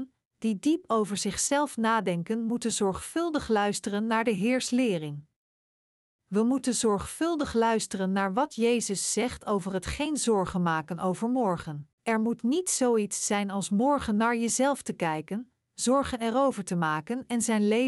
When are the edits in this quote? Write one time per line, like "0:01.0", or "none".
0:11.9